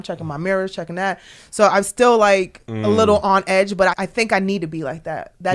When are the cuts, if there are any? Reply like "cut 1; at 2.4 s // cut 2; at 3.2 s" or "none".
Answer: cut 1; at 2.6 s // cut 2; at 3.9 s